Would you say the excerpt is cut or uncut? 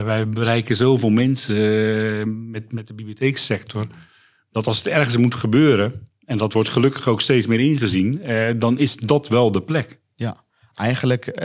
uncut